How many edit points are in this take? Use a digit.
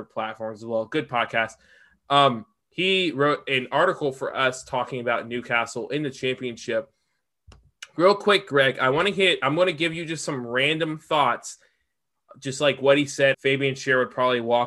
1